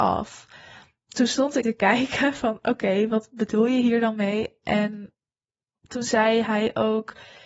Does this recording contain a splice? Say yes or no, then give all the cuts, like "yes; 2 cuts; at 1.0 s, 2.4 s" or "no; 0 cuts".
yes; 1 cut; at 1.6 s